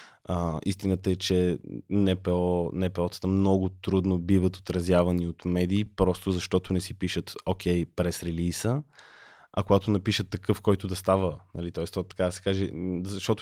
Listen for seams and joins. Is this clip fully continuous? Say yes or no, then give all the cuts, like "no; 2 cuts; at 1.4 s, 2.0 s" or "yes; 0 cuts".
yes; 0 cuts